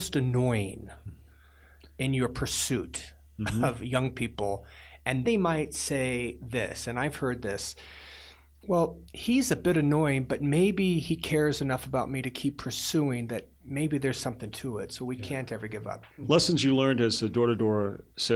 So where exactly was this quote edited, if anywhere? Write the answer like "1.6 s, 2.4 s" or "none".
5.2 s, 16.1 s